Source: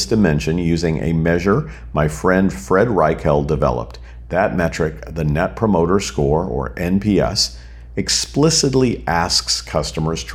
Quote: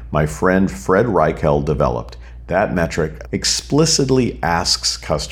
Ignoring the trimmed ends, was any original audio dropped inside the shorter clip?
yes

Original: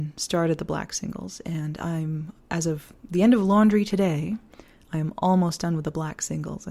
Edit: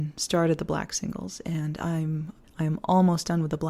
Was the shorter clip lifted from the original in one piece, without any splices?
no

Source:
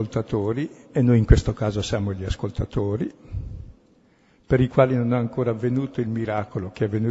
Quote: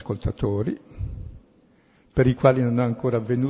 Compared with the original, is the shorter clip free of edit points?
yes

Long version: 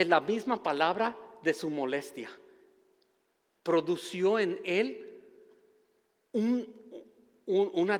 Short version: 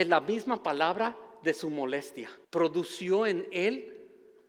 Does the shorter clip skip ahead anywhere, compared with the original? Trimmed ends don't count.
yes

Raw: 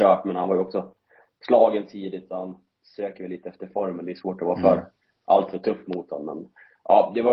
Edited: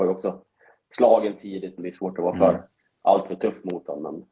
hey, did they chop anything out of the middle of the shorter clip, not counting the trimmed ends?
yes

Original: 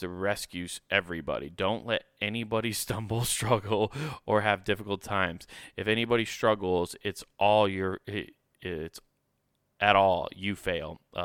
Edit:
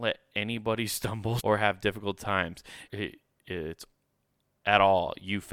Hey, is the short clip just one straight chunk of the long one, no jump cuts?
no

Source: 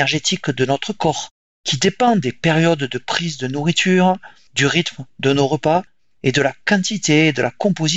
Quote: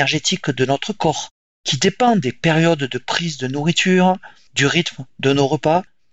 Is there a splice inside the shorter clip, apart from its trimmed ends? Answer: no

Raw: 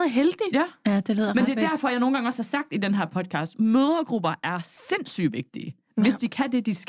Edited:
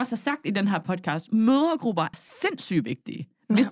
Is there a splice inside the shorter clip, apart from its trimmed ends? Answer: yes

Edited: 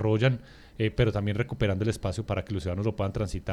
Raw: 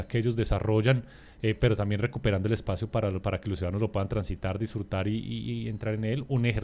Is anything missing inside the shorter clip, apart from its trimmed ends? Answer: yes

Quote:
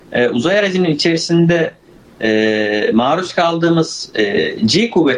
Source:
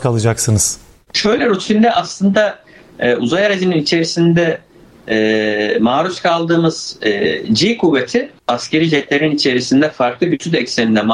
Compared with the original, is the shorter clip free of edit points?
yes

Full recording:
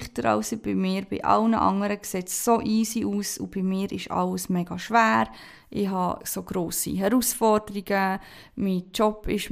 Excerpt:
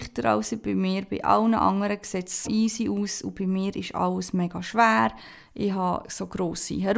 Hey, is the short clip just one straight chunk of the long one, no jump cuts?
no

